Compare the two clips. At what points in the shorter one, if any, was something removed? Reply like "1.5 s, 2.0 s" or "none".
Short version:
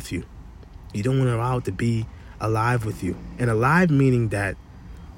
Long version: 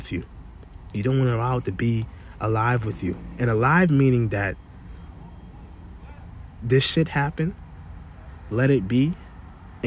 none